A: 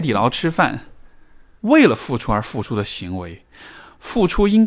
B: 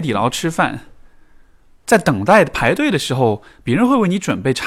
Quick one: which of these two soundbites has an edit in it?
A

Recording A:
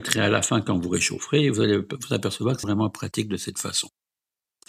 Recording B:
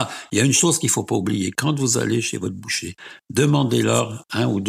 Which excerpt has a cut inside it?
A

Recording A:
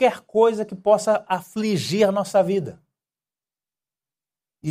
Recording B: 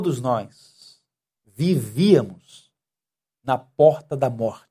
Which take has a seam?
B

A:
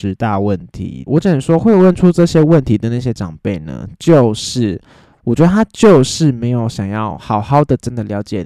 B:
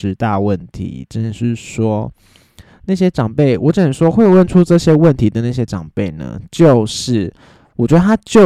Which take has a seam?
A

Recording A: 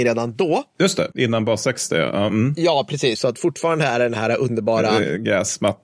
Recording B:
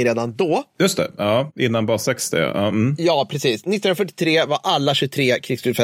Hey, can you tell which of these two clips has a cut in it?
A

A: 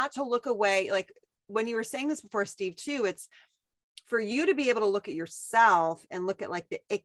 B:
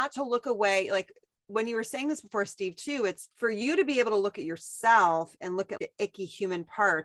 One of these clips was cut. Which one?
B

